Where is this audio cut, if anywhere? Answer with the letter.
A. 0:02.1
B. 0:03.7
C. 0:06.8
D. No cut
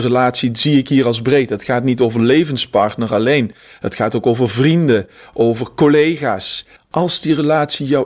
C